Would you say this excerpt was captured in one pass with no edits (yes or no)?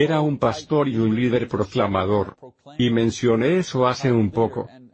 yes